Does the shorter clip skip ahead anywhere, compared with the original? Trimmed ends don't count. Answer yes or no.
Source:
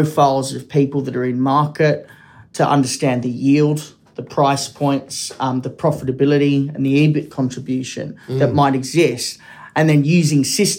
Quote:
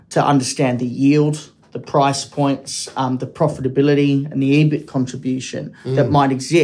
no